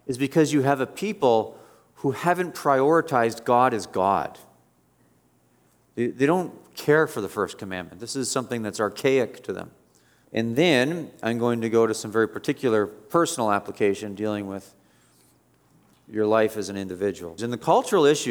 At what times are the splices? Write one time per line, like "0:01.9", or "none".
0:10.2
0:17.4